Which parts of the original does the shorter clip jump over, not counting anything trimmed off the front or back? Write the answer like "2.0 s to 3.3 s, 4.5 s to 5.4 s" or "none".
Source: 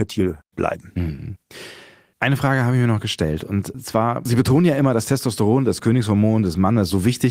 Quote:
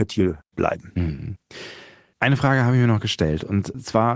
none